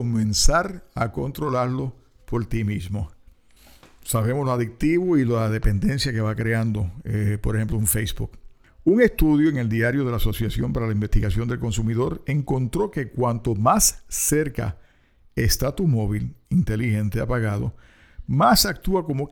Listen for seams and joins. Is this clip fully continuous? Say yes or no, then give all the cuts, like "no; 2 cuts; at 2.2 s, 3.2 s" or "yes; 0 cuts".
yes; 0 cuts